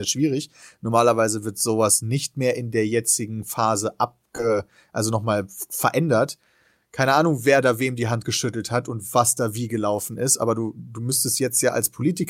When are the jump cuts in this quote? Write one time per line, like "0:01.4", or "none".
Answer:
none